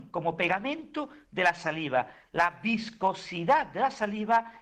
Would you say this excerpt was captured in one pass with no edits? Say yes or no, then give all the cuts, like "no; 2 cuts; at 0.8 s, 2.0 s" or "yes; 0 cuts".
yes; 0 cuts